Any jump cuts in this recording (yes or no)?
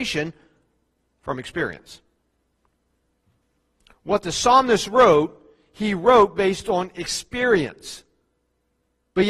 no